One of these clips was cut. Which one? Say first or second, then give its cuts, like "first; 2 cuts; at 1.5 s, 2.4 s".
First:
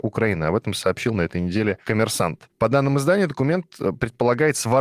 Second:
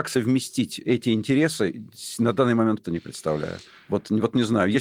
second; 1 cut; at 2.8 s